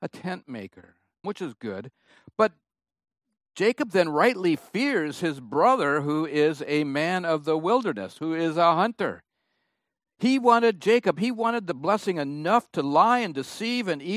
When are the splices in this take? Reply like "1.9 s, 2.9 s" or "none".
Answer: 1.2 s